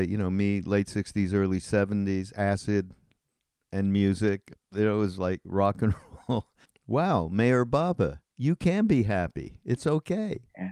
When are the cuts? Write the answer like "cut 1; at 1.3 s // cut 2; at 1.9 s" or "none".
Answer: cut 1; at 6.6 s // cut 2; at 8.3 s